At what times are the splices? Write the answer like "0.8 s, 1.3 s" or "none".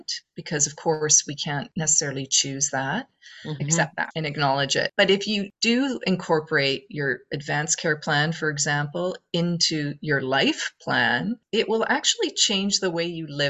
3.6 s

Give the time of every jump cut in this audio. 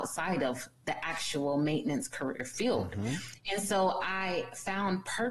none

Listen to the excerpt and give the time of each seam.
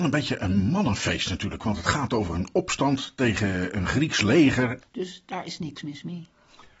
4.8 s

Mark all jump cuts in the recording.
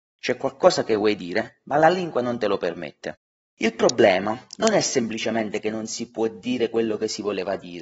3.4 s

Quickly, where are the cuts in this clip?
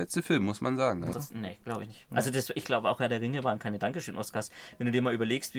1.1 s

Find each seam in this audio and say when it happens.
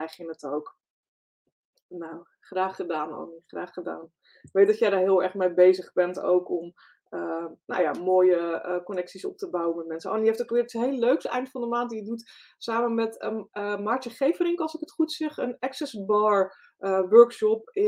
none

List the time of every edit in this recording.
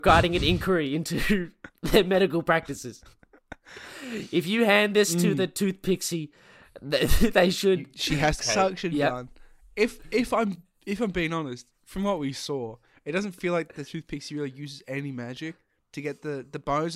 8.4 s

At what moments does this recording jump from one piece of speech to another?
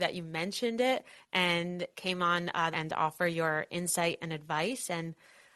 2.7 s

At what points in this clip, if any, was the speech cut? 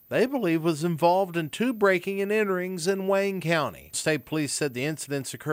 none

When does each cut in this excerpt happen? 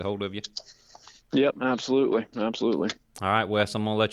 none

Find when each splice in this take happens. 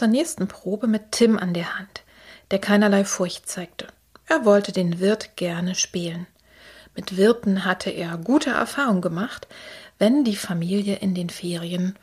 none

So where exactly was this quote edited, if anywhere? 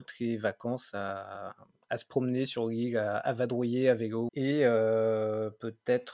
4.3 s

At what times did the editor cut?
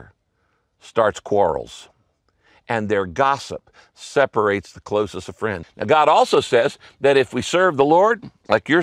5.6 s

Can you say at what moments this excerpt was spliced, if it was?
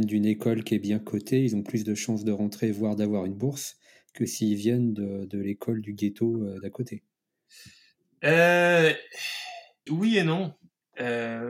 9.9 s

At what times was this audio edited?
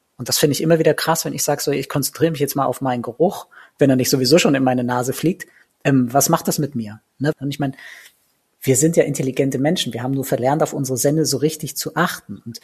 7.3 s

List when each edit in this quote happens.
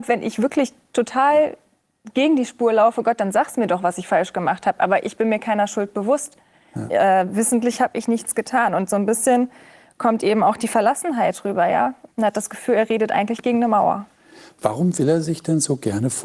12.1 s

